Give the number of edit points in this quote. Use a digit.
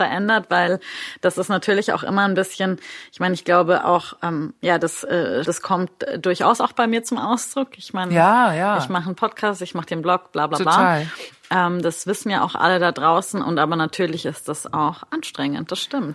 1